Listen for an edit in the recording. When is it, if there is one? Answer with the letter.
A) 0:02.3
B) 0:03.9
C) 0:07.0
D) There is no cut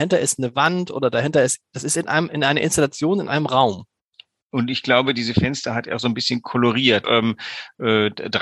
C